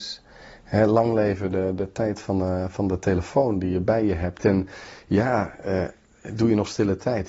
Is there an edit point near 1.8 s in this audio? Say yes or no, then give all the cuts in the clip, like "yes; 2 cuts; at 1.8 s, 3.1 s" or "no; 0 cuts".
no; 1 cut; at 4.4 s